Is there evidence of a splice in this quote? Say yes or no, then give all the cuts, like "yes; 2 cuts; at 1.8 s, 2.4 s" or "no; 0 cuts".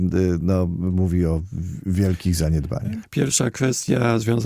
yes; 1 cut; at 3.0 s